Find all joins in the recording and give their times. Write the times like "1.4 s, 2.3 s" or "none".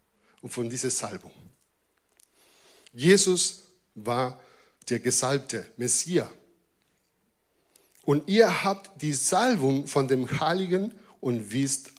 none